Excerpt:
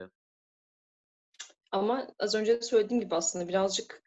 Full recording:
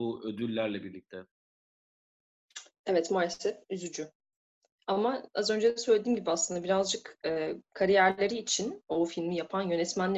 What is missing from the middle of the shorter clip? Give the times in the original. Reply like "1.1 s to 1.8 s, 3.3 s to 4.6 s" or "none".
2.8 s to 4.8 s